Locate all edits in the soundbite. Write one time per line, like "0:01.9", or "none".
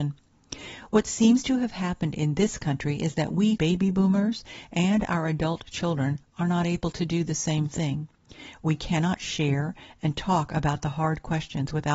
0:03.6

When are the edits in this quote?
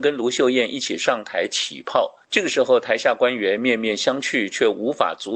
none

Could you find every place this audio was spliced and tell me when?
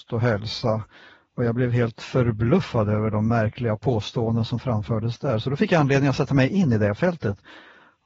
none

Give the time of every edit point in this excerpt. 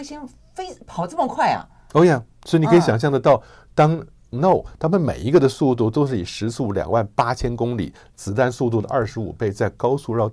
0:04.3

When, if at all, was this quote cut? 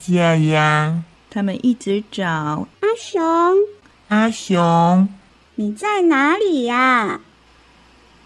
0:01.2
0:02.7

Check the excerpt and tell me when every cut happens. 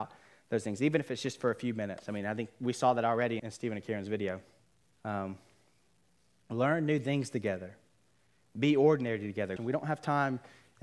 0:03.4
0:04.9
0:09.6

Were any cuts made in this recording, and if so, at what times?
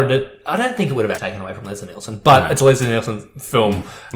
0:01.2

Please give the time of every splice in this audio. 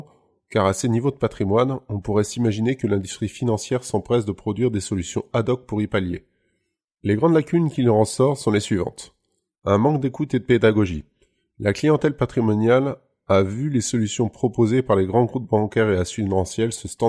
0:06.8

